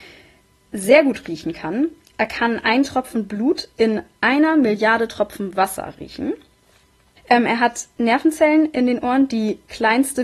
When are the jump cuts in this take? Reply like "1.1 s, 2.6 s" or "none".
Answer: 7.2 s